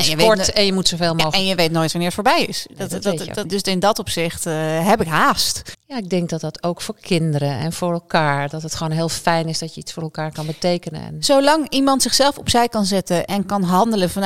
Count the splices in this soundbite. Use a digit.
2